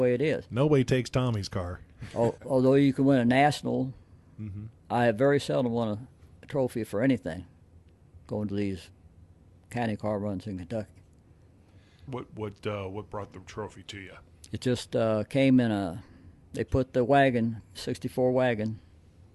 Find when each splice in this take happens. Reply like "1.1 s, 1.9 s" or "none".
2.4 s, 12.1 s